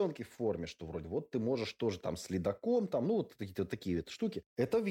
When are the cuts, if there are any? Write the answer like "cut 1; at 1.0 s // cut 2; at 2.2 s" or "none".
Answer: none